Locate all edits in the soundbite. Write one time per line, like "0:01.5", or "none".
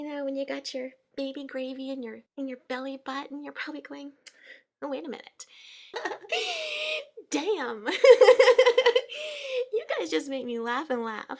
0:02.3
0:05.9